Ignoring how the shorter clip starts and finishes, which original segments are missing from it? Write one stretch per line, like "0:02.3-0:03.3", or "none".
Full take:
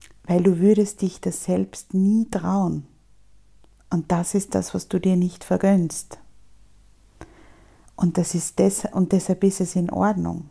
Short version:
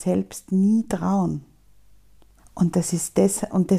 0:03.8-0:07.8